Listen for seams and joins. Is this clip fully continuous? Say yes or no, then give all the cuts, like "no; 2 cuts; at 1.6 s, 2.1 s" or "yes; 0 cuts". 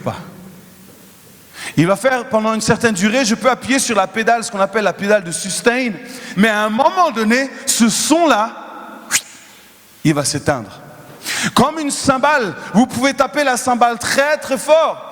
no; 1 cut; at 6.3 s